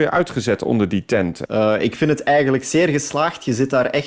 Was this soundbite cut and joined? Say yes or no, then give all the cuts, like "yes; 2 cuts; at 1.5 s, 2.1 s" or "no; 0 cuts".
yes; 1 cut; at 1.5 s